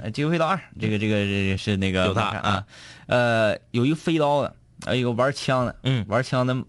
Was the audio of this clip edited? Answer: yes; 1 cut; at 1.6 s

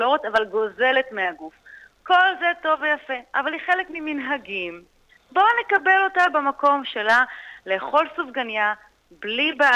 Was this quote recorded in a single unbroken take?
yes; 0 cuts

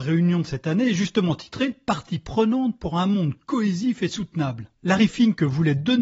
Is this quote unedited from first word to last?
no; 1 cut; at 4.7 s

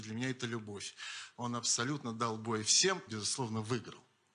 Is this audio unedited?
no; 2 cuts; at 1.3 s, 3.1 s

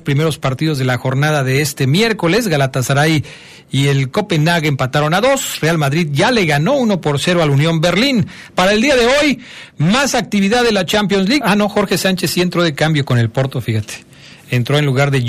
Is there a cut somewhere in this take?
yes; 2 cuts; at 8.5 s, 11.4 s

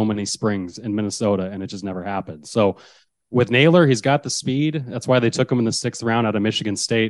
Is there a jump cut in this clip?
no; 0 cuts

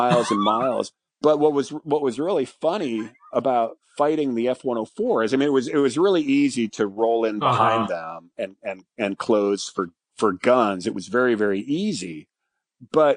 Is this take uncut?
yes; 0 cuts

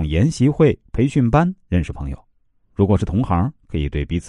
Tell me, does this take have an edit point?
no; 0 cuts

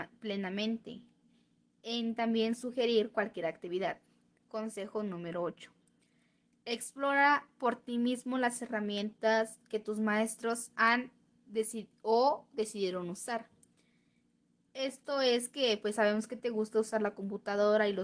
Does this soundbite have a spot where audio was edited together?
no; 0 cuts

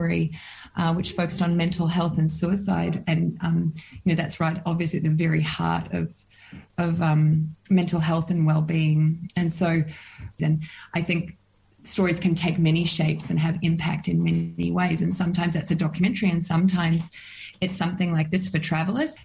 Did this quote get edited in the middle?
yes; 1 cut; at 10.4 s

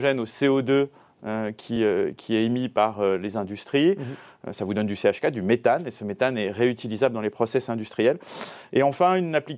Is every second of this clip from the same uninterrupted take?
yes; 0 cuts

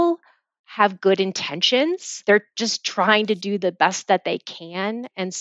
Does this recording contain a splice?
no; 0 cuts

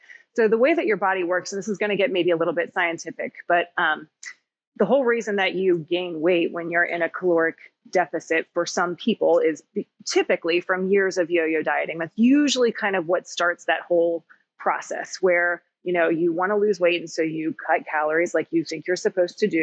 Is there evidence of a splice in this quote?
no; 0 cuts

